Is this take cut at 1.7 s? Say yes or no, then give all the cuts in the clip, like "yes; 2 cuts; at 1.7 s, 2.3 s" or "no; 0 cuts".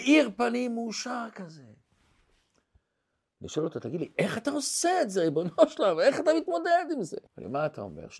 no; 1 cut; at 7.3 s